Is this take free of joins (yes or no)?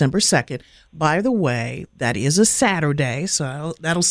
yes